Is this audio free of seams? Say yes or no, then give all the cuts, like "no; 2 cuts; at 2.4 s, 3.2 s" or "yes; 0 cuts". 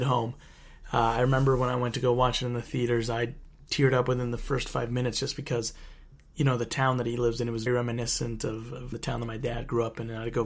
no; 2 cuts; at 7.7 s, 8.9 s